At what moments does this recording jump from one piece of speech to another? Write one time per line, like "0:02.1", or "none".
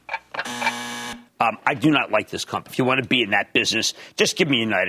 0:01.3
0:02.7